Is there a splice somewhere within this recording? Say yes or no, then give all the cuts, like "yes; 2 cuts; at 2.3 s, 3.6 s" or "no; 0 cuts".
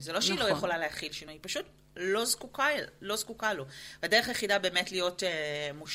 no; 0 cuts